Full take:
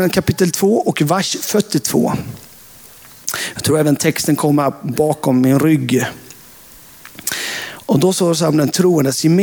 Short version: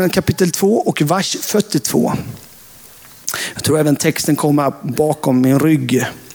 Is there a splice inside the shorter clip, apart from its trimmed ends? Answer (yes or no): no